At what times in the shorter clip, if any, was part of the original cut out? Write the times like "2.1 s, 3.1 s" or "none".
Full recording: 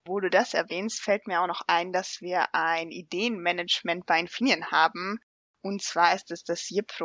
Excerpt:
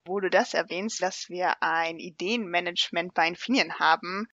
1.0 s